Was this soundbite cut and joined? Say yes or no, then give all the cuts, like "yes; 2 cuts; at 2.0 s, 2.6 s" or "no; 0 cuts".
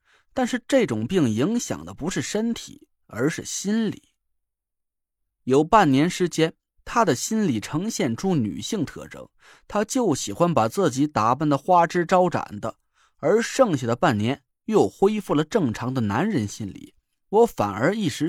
no; 0 cuts